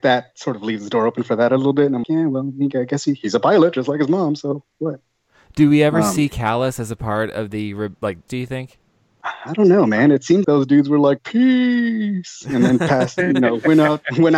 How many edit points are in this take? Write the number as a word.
three